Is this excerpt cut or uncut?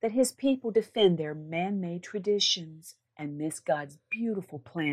cut